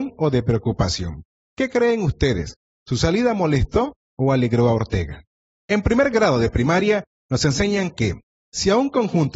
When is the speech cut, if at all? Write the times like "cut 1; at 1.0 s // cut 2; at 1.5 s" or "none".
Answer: none